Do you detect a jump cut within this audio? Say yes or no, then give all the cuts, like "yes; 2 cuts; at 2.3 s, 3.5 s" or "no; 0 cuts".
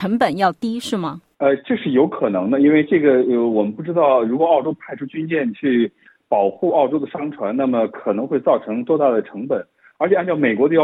no; 0 cuts